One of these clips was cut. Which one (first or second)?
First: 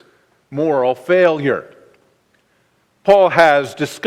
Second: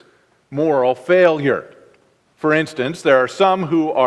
second